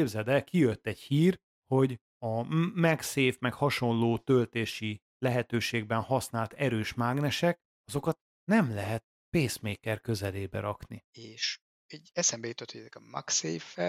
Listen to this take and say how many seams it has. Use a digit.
1